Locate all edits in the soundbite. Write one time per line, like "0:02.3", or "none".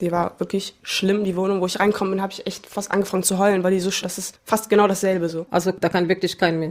0:04.0